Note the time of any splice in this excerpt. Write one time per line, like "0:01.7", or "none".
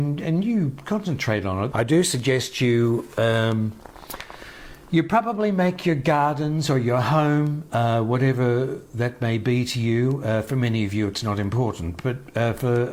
0:01.7